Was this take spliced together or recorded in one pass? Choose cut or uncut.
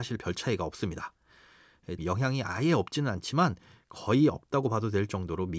cut